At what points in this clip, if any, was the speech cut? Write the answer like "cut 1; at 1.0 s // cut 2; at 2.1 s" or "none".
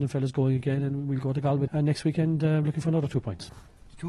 cut 1; at 1.7 s